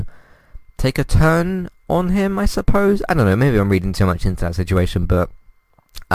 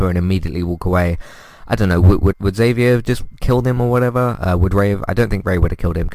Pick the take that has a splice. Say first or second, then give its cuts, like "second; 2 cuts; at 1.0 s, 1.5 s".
second; 1 cut; at 2.3 s